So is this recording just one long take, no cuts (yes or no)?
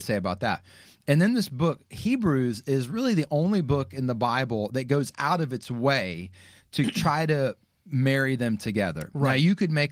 yes